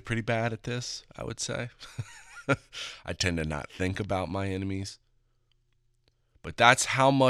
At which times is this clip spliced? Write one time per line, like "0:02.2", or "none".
none